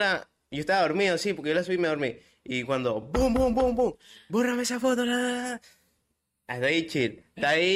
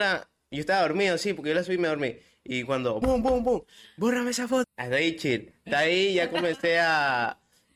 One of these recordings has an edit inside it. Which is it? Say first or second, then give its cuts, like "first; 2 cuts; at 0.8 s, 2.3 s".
second; 2 cuts; at 3.0 s, 4.6 s